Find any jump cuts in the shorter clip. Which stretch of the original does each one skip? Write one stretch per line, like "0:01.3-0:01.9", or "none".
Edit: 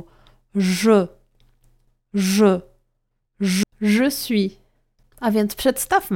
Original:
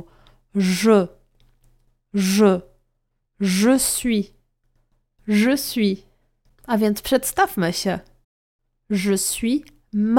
0:03.6-0:05.1